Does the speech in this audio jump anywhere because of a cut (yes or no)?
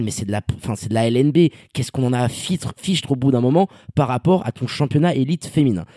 no